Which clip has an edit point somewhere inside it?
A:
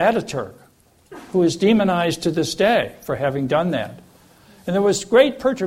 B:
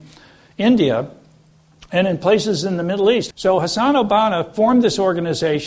B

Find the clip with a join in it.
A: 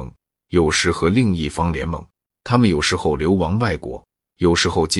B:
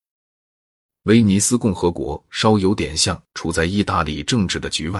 A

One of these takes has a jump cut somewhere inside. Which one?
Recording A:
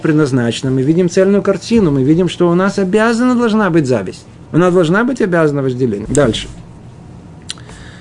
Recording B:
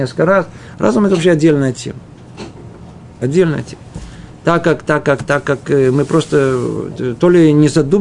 A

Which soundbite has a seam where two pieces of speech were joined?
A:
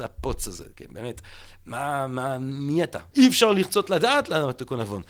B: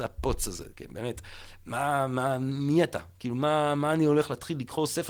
A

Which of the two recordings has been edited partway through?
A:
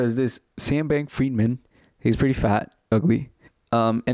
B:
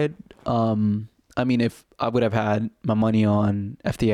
A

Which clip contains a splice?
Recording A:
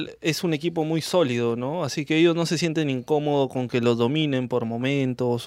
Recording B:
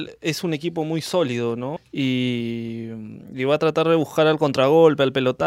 B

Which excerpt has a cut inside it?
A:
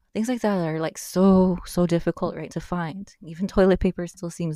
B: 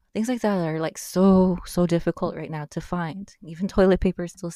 A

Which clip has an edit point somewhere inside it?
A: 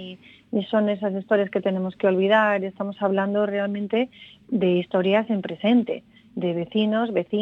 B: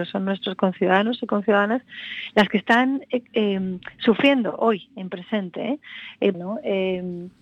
B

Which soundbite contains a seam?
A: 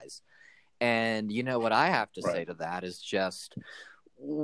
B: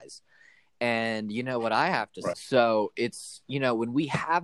B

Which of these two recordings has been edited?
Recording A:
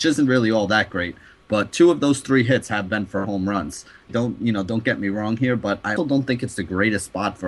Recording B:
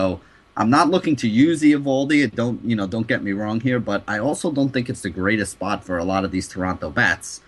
A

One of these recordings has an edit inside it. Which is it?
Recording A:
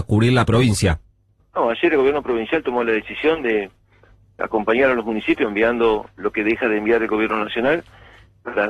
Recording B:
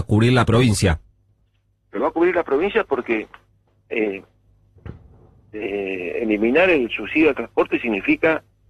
A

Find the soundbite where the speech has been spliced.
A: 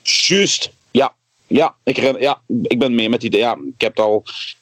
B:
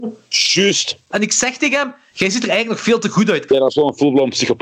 B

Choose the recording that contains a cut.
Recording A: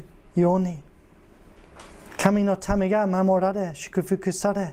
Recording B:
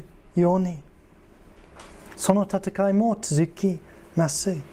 B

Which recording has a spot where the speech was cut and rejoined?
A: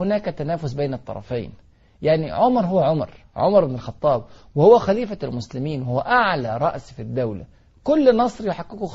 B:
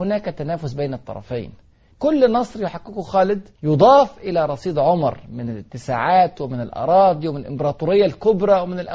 B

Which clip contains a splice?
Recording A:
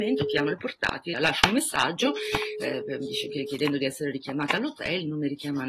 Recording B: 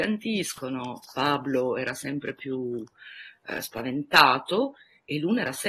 A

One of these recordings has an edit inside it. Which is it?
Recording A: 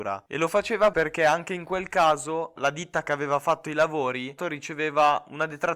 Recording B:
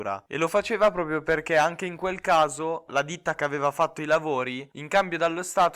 A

